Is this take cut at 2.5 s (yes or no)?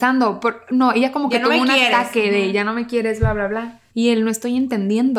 no